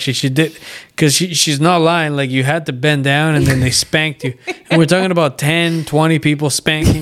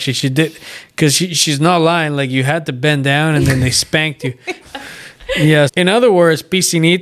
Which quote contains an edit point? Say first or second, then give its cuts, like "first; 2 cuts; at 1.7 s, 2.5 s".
second; 2 cuts; at 4.6 s, 5.7 s